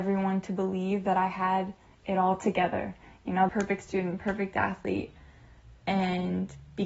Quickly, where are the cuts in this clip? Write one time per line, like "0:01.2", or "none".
0:03.5

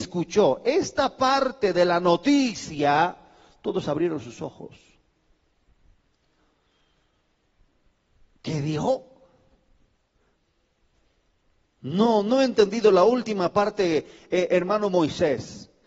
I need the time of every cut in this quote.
none

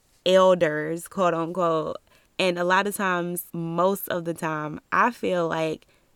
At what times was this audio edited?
0:02.2
0:03.5

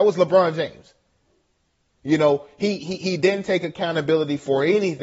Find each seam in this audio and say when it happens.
0:02.8

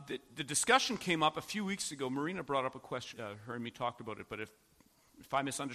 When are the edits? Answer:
0:03.1

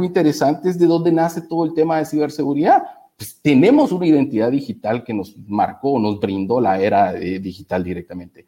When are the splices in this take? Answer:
none

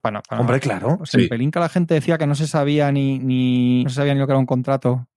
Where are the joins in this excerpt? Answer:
0:01.0
0:03.9

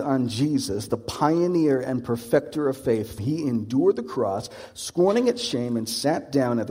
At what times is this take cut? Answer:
0:03.2

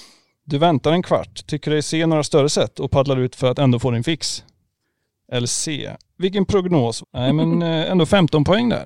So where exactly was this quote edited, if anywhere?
0:07.0

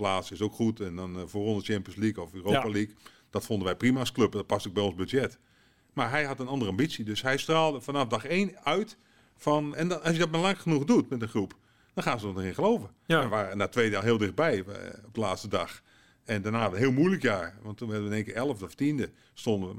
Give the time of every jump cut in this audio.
0:09.7

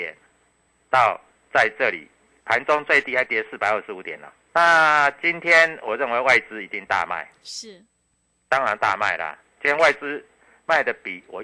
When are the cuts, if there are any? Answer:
0:04.5

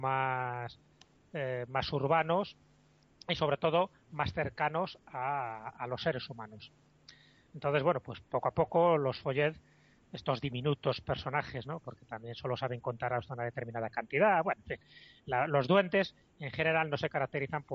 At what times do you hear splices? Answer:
0:11.8

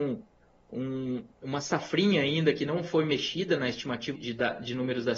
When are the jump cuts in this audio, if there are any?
0:04.1

